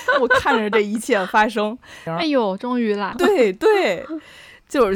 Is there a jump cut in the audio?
yes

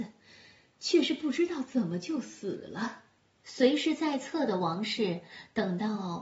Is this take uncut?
no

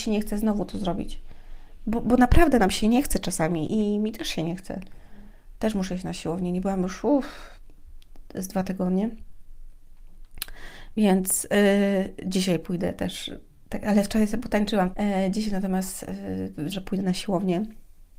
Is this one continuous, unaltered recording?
no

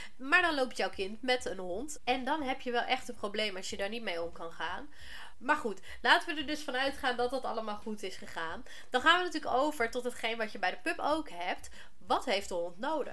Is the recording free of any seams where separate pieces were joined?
no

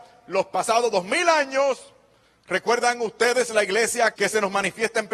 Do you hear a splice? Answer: yes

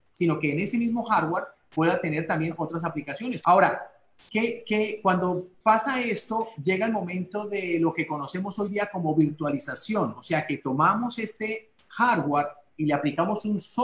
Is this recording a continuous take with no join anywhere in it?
no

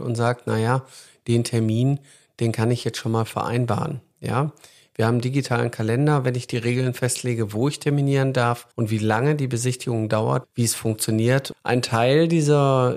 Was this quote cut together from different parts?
yes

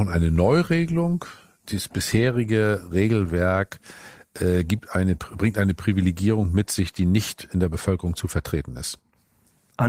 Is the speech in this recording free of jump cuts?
yes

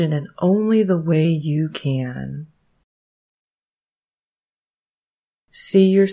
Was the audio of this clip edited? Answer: no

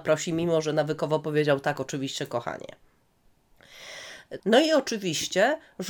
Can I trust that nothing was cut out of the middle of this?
no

